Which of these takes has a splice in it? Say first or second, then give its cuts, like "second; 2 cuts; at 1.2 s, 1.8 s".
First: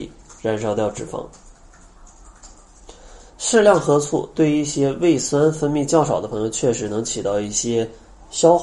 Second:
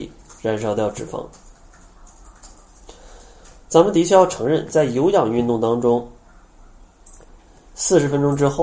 first; 1 cut; at 3.3 s